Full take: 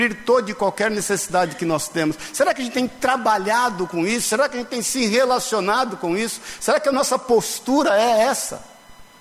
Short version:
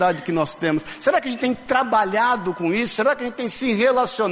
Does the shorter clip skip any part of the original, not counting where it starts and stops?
no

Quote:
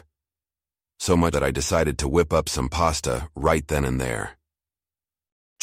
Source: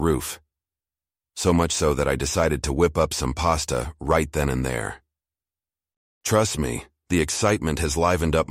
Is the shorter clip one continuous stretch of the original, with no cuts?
no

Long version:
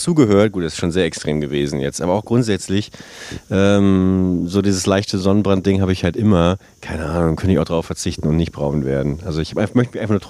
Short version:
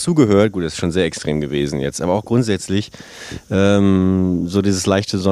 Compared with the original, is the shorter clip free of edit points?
yes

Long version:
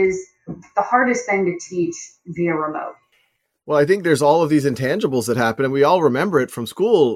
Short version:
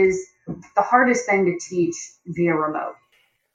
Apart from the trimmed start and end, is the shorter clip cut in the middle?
no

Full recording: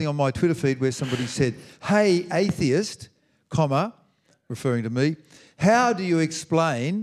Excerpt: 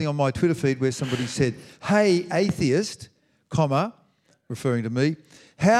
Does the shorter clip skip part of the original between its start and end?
no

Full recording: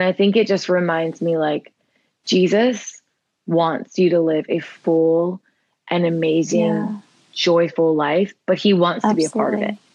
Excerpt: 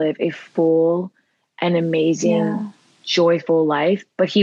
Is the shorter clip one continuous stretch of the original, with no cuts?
yes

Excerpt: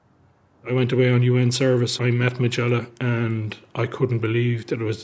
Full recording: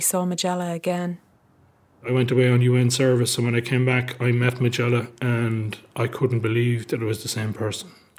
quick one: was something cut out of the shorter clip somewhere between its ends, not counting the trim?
yes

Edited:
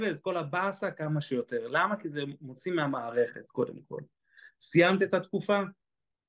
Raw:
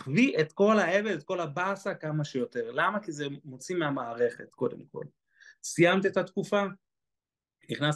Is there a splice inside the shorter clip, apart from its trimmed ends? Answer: no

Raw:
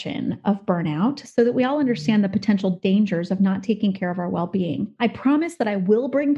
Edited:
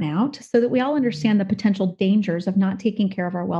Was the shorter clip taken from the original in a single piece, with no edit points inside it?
yes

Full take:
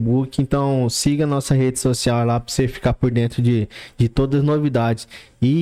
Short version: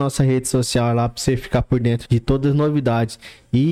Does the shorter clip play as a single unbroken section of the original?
no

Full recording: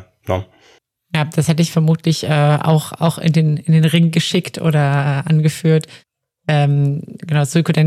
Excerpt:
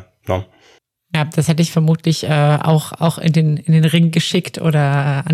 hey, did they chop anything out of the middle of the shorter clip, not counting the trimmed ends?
no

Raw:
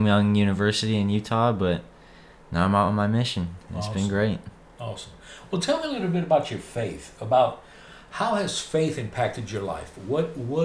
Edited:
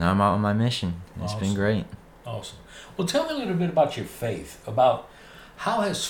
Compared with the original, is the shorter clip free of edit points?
yes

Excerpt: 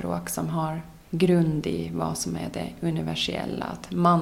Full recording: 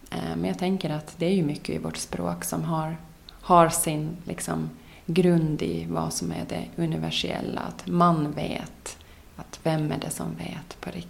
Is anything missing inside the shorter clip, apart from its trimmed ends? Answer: yes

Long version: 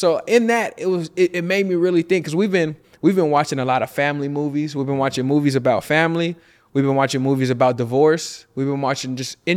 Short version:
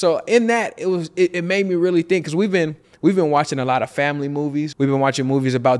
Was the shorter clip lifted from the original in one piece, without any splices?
no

